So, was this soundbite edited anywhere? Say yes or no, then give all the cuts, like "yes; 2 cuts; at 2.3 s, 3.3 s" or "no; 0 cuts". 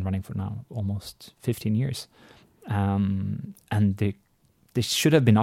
no; 0 cuts